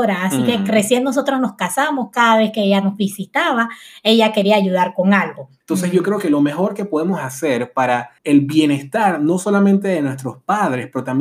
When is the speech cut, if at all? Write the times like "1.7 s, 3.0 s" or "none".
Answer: 5.6 s, 8.2 s